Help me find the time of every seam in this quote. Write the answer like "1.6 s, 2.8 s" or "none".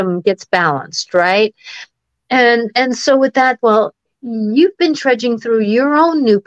3.6 s